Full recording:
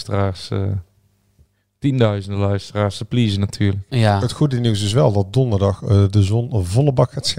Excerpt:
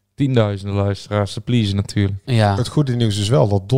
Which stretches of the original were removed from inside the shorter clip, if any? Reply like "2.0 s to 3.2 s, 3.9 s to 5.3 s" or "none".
none